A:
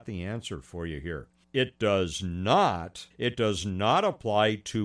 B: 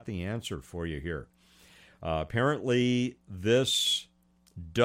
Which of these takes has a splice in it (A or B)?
A